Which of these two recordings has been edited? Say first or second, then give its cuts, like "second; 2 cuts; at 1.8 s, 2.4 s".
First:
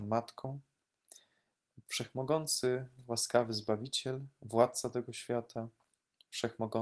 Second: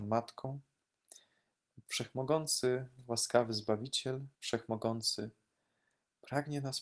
second; 1 cut; at 4.3 s